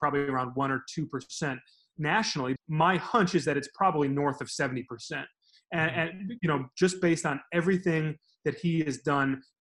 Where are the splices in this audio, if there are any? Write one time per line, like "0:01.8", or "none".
0:02.6